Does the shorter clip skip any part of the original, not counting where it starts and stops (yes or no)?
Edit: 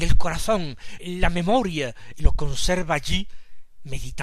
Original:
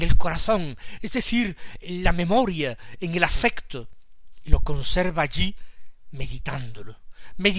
yes